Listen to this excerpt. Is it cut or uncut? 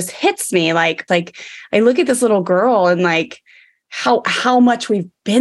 cut